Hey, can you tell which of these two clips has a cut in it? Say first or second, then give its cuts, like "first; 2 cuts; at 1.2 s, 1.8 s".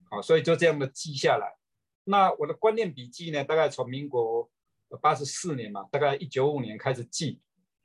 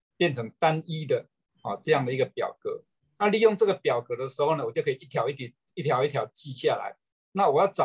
first; 1 cut; at 6.3 s